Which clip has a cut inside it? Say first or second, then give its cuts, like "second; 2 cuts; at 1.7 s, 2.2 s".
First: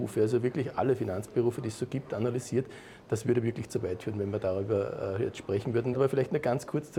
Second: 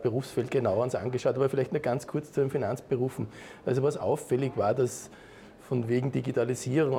first; 1 cut; at 5.9 s